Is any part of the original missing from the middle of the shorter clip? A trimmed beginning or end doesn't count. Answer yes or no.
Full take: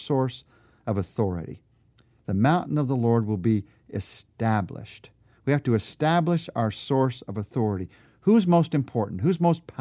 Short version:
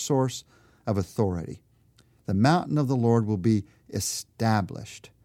no